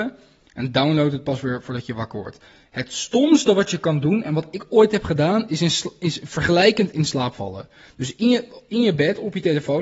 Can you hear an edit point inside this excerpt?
no; 0 cuts

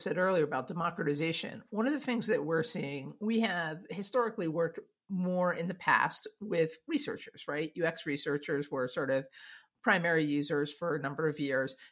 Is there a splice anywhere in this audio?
no; 0 cuts

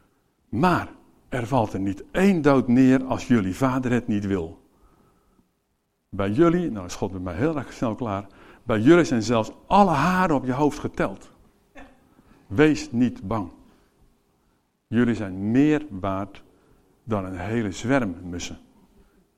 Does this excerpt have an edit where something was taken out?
no; 0 cuts

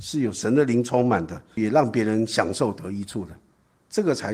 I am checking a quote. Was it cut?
yes; 1 cut; at 1.6 s

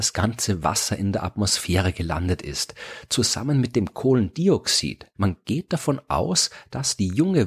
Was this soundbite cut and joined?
yes; 1 cut; at 5.2 s

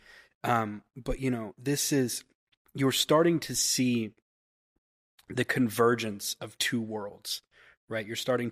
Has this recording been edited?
no; 0 cuts

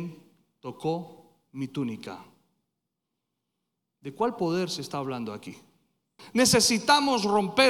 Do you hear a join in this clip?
yes; 1 cut; at 6.2 s

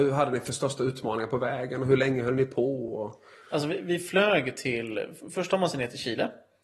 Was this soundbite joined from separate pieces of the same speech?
no; 0 cuts

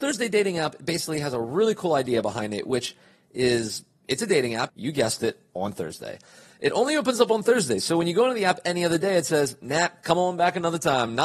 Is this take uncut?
no; 1 cut; at 4.7 s

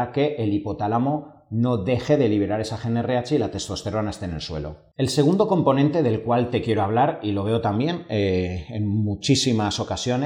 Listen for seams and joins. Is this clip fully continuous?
yes; 0 cuts

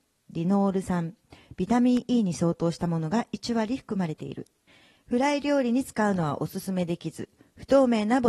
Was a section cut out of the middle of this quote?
no; 0 cuts

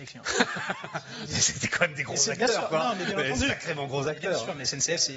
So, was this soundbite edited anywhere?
no; 0 cuts

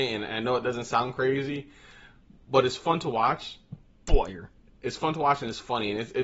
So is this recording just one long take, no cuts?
yes; 0 cuts

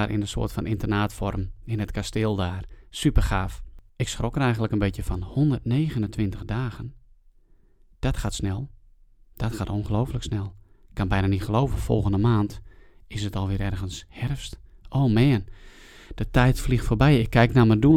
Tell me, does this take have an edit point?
yes; 1 cut; at 3.9 s

